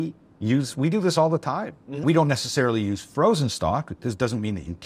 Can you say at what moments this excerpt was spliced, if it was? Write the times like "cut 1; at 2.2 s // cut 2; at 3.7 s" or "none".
none